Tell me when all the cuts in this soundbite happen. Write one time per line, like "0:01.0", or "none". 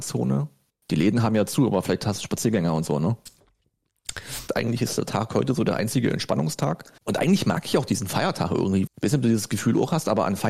0:04.5
0:07.0
0:08.9

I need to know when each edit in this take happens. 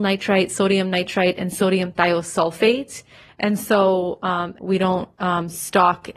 0:03.3
0:04.6

